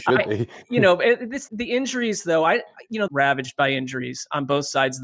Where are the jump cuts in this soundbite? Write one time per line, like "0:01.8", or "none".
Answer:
0:01.5
0:03.1

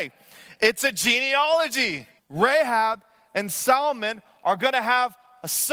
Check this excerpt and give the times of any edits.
0:02.2

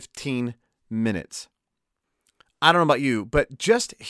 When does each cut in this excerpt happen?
none

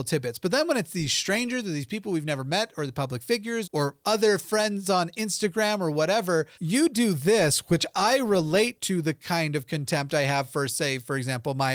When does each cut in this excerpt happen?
0:03.6
0:06.5

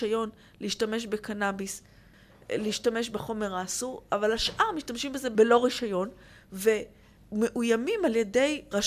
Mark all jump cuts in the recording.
none

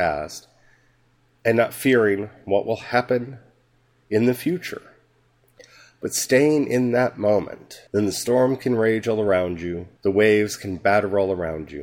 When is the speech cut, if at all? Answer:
0:07.9
0:10.0

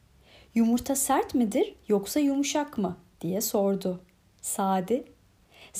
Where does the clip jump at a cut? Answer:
none

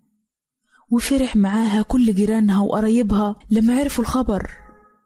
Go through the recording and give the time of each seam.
0:03.4

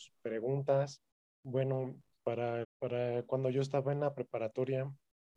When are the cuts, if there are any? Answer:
0:01.3
0:02.6

